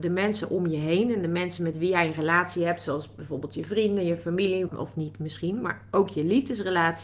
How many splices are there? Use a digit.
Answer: 1